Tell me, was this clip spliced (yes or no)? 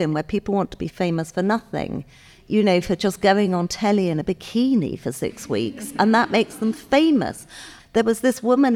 yes